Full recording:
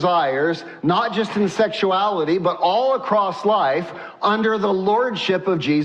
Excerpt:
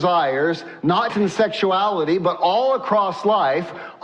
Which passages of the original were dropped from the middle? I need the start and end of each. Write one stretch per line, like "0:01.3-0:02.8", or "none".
0:01.1-0:01.3